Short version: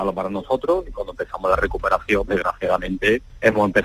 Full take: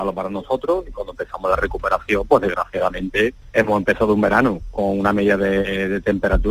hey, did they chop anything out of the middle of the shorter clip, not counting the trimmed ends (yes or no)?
yes